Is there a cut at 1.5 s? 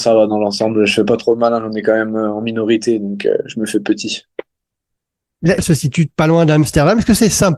no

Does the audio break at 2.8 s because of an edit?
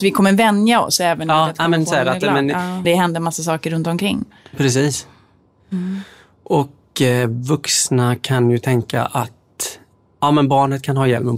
yes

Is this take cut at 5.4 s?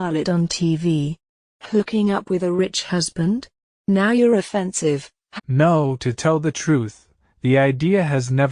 yes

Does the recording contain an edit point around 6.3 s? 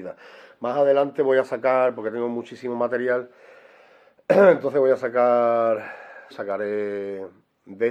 yes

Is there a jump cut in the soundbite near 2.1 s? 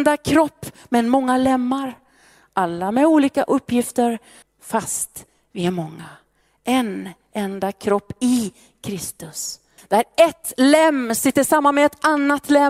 no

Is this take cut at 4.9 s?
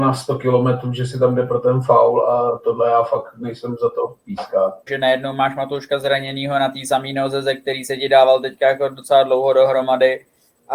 yes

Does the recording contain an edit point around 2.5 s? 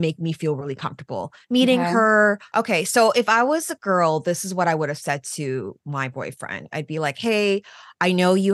yes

